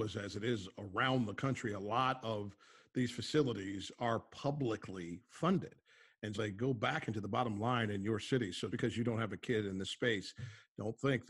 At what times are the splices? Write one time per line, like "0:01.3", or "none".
0:06.3
0:08.7